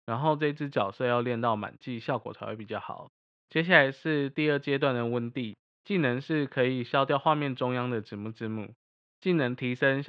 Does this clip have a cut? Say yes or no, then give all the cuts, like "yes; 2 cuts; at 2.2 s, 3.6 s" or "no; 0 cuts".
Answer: no; 0 cuts